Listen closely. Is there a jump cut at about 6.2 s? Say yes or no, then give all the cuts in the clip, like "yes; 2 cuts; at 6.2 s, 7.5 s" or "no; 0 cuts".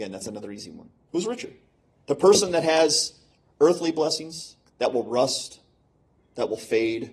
no; 2 cuts; at 1.1 s, 4.7 s